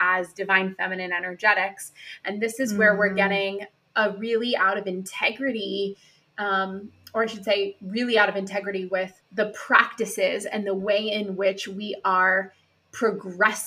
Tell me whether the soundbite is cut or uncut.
uncut